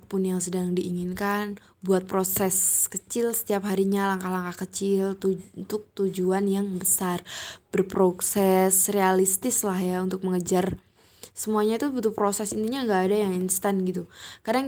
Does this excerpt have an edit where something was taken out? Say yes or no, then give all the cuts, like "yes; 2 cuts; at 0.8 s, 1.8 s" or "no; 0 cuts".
no; 0 cuts